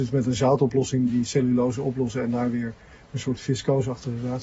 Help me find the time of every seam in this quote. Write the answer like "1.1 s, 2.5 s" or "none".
1.1 s